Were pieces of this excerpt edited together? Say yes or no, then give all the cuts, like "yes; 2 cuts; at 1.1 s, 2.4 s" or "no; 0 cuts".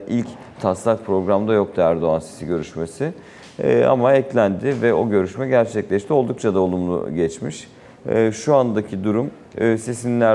no; 0 cuts